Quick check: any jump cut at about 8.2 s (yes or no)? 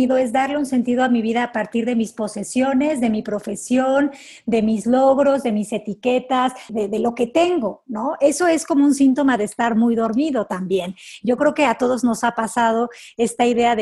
no